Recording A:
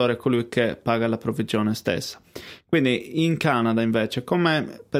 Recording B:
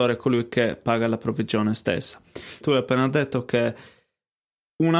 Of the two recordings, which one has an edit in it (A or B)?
B